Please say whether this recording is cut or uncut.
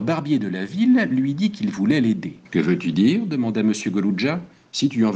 cut